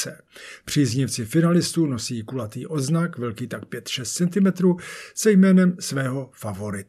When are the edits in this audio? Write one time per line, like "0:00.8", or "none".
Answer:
none